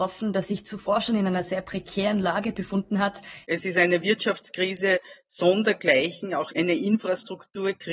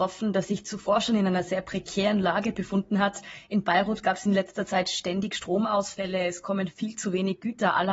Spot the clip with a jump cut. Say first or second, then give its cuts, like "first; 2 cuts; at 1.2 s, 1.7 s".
first; 1 cut; at 3.4 s